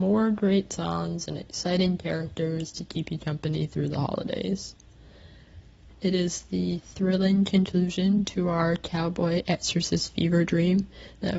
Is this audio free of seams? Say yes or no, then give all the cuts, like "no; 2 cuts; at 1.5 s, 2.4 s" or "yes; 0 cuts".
no; 1 cut; at 5.9 s